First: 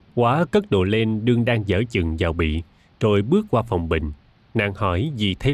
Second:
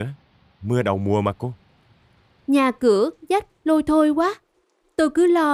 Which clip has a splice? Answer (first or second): first